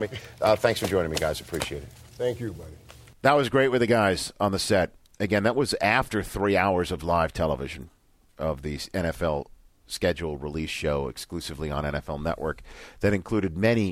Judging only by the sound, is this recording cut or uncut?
uncut